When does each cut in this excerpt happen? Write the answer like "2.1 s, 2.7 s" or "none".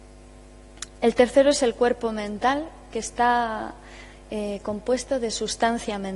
none